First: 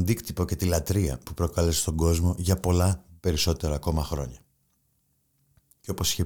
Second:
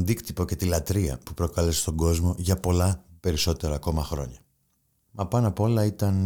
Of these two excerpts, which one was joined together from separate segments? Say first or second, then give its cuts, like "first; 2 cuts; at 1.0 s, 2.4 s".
second; 1 cut; at 5.0 s